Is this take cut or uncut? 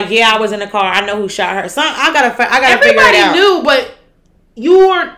uncut